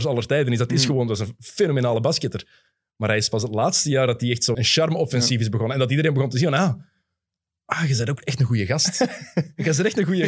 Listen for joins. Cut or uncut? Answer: cut